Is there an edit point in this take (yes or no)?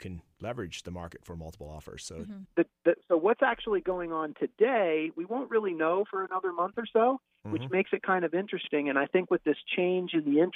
yes